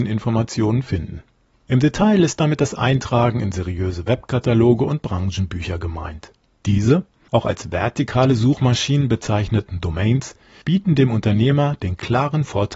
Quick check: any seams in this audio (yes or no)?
no